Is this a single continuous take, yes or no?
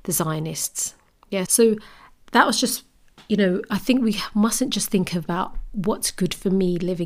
no